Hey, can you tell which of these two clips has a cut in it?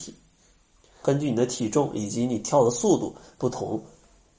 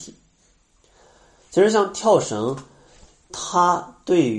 first; 1 cut; at 1.0 s

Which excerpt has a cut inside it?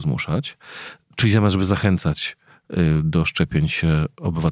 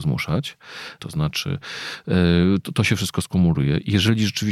second; 1 cut; at 1.0 s

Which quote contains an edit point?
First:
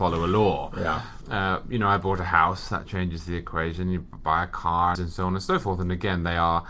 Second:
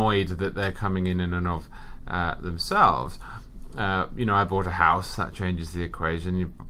first; 2 cuts; at 1.2 s, 5.0 s

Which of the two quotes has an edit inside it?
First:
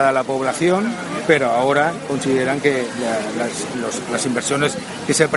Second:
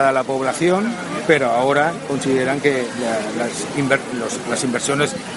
first; 1 cut; at 3.7 s

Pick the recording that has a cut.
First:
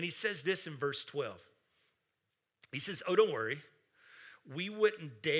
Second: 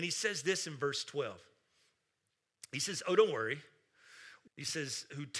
second; 1 cut; at 4.5 s

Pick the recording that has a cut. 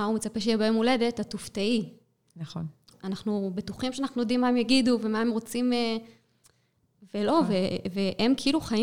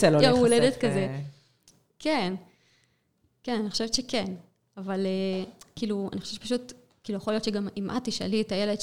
first; 1 cut; at 2.9 s

